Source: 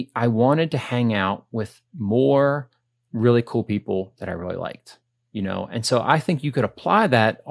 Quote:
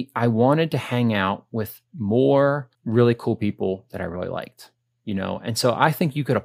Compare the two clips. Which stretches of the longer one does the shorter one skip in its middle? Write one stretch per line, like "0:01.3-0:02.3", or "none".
0:02.7-0:03.0